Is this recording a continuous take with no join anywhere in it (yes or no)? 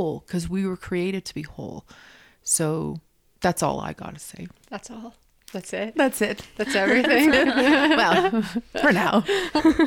yes